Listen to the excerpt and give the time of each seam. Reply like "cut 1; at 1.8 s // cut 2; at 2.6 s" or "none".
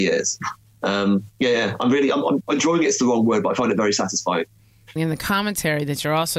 cut 1; at 2.4 s // cut 2; at 5.0 s